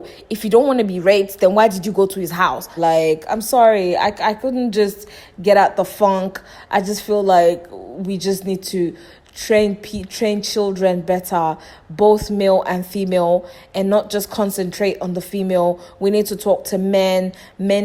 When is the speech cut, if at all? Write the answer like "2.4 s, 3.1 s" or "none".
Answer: 2.8 s